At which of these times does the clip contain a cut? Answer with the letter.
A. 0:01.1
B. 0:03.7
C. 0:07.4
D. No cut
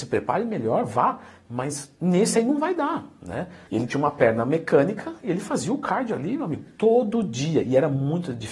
B